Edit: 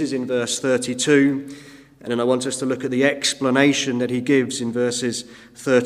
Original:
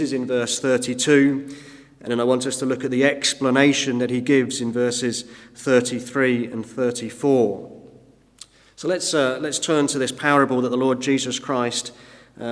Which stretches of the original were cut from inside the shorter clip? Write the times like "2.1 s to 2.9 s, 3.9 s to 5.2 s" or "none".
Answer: none